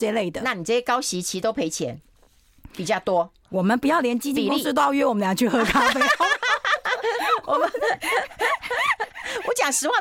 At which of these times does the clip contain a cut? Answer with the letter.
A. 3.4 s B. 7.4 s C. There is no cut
A